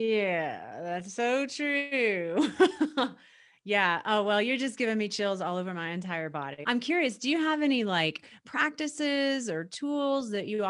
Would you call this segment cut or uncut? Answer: cut